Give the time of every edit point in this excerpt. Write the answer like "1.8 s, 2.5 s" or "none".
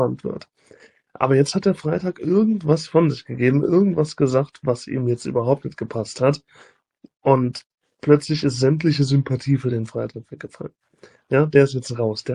none